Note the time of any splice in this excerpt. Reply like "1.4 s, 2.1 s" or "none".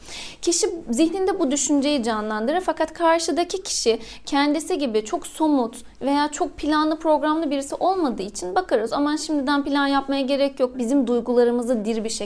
8.9 s, 10.7 s